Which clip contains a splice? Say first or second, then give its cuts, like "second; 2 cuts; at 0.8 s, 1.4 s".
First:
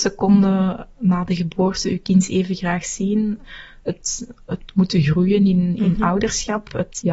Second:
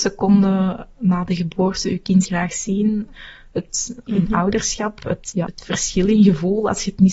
second; 3 cuts; at 2.3 s, 4.1 s, 5.5 s